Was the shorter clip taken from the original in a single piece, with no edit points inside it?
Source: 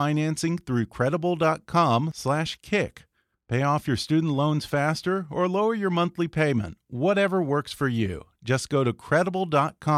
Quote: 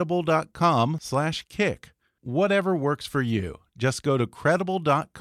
no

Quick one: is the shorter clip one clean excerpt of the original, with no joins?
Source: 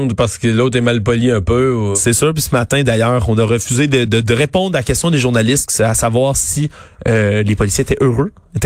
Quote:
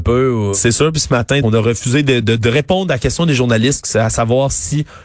no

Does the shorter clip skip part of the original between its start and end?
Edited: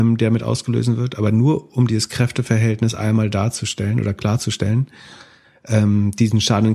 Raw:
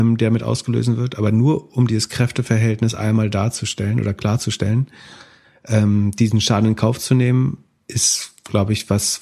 no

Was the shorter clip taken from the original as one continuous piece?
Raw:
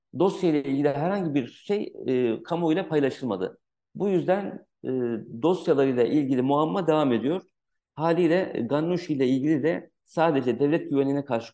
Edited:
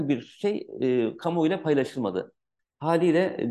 no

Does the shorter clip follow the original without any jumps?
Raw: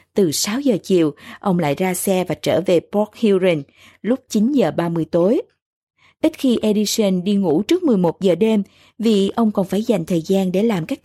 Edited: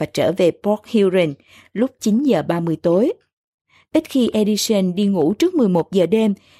yes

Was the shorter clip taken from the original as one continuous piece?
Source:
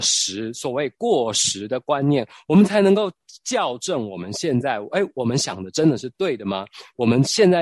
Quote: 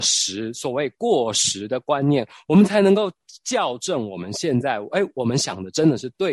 yes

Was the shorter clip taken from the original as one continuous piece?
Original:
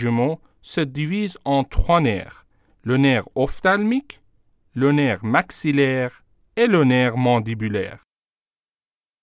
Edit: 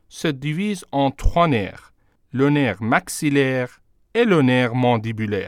no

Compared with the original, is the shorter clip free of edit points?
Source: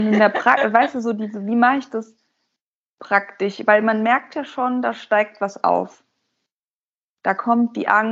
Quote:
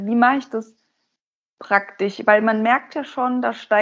yes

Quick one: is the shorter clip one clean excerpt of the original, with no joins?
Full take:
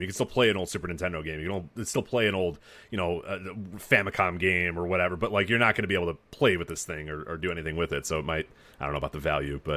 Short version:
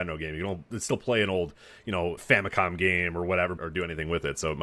no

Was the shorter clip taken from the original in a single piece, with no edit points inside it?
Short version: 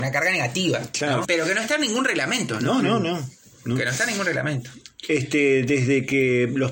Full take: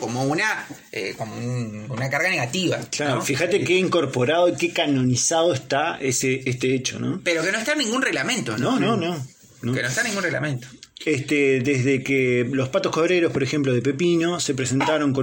no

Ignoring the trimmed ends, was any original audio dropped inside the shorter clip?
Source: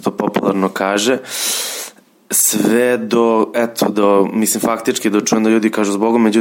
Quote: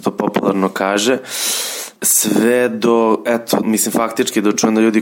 yes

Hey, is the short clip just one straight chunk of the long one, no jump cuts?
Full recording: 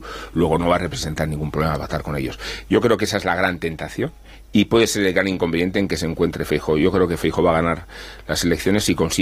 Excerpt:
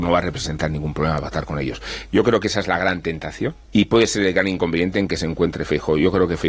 no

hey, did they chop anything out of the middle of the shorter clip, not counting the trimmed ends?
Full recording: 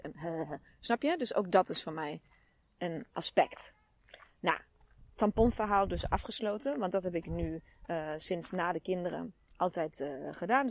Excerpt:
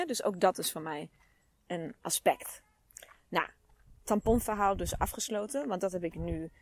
no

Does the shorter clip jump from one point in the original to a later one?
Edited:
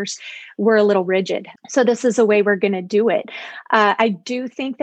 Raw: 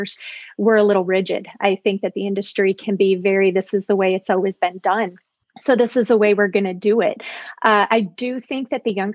yes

